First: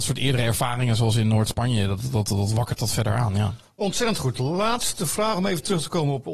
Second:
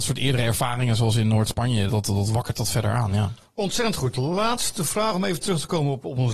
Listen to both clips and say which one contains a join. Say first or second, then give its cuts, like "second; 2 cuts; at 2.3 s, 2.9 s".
second; 1 cut; at 1.9 s